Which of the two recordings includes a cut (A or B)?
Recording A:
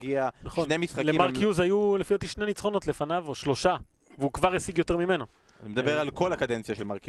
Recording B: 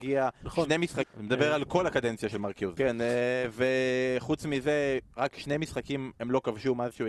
B